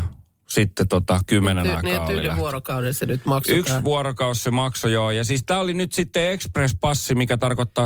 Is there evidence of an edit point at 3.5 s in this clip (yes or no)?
no